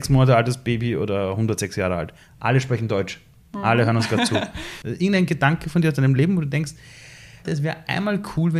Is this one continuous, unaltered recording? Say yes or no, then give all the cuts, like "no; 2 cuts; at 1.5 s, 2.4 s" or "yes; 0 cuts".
no; 2 cuts; at 4.8 s, 7.5 s